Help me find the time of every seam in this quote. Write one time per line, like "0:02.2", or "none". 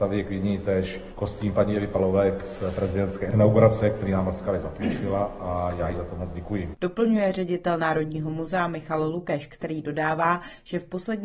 none